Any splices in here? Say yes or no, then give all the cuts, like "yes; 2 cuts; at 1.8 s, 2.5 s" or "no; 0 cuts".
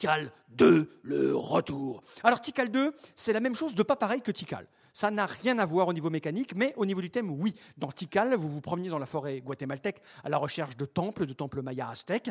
no; 0 cuts